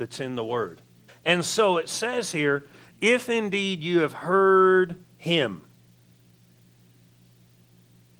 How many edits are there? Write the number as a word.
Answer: one